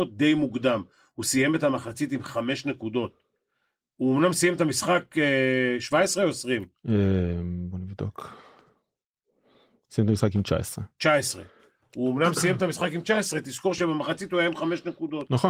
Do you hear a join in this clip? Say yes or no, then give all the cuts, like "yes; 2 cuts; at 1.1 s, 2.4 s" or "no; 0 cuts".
no; 0 cuts